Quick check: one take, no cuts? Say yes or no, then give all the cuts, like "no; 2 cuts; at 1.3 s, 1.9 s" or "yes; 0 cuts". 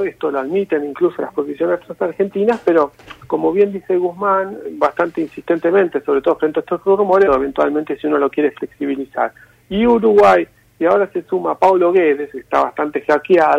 no; 2 cuts; at 7.3 s, 12.3 s